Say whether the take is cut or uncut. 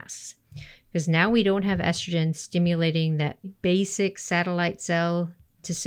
cut